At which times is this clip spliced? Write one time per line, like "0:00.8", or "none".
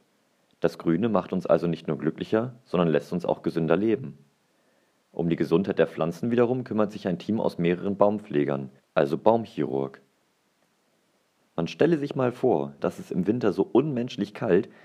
0:08.8
0:11.4
0:12.8